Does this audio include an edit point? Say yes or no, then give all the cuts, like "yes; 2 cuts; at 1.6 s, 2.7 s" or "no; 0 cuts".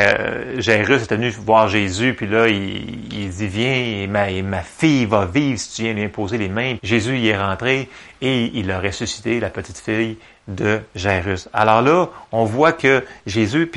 yes; 1 cut; at 6.8 s